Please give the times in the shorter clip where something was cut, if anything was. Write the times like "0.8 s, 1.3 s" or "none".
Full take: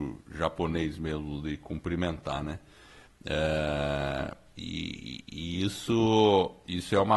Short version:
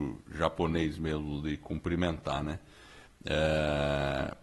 none

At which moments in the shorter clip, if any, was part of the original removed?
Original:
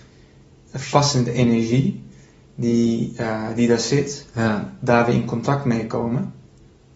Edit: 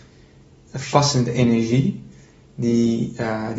none

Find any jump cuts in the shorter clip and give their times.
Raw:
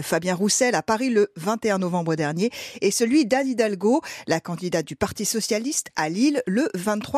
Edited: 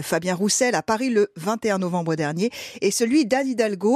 none

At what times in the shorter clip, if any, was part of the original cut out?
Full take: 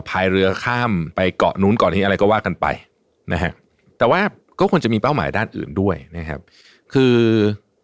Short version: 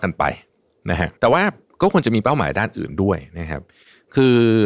1.2 s

